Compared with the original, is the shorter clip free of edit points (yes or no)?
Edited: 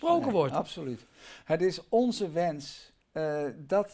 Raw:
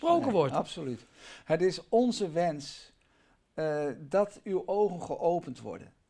no